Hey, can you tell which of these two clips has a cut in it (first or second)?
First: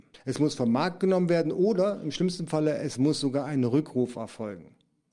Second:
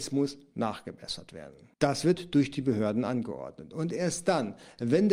second